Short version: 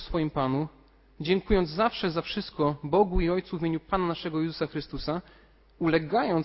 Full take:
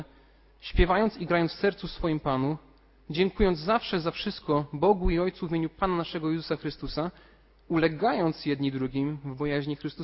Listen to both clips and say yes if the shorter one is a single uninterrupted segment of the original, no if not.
yes